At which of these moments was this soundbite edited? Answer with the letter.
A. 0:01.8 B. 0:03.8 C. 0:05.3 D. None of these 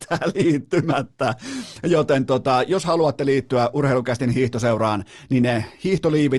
D